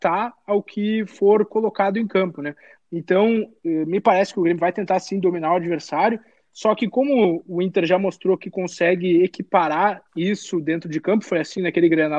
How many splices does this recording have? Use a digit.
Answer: 2